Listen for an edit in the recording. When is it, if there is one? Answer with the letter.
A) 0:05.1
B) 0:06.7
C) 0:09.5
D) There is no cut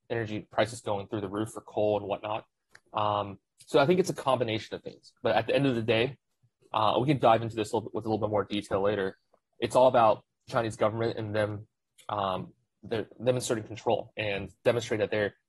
D